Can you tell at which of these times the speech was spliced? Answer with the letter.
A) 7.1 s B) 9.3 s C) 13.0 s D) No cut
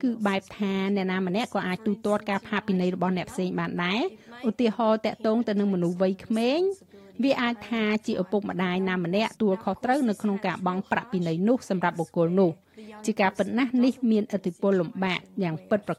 B